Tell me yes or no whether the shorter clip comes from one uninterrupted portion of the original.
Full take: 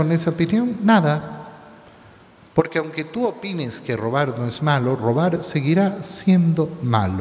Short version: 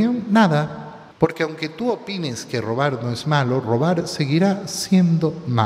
no